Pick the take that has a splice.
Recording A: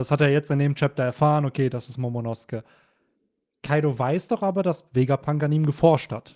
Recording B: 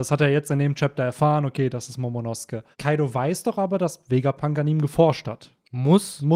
B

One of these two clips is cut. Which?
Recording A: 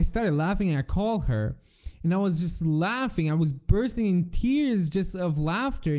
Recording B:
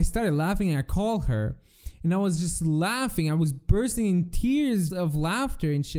B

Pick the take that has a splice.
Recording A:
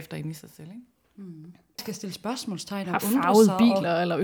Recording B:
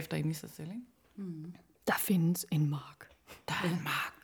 A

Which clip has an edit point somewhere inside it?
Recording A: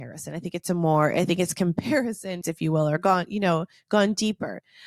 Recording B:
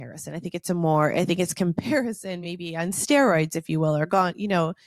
A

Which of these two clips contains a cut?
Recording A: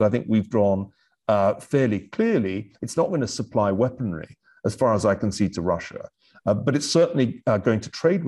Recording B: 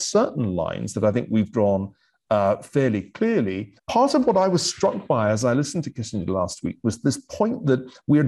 B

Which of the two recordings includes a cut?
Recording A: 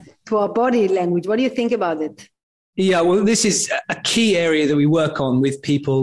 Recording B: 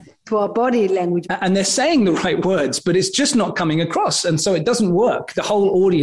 B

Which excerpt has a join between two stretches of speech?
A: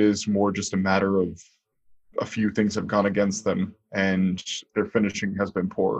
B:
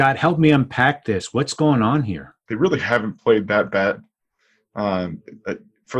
B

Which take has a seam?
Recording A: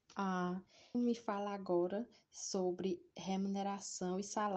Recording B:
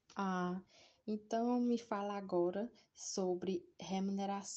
A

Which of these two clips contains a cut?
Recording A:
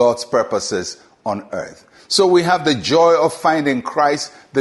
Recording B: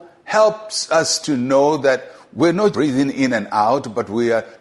B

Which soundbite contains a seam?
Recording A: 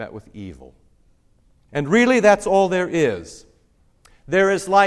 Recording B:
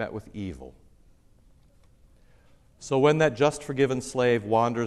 A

